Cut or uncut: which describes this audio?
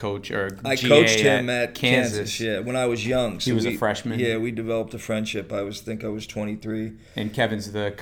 uncut